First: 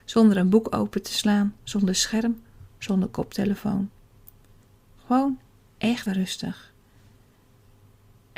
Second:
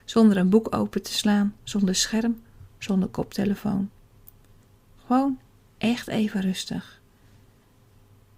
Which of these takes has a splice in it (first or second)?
first